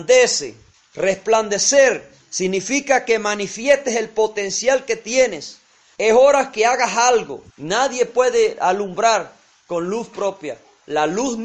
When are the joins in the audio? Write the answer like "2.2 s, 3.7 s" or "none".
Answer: 6.0 s, 7.5 s